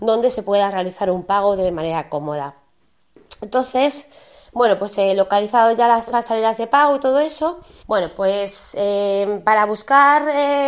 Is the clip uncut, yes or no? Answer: no